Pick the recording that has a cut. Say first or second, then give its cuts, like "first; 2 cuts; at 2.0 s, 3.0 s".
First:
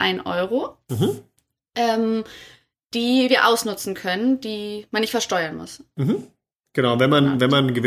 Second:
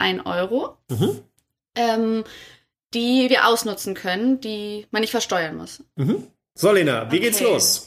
second; 1 cut; at 6.6 s